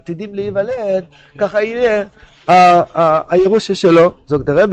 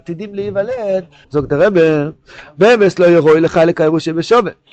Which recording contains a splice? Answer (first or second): second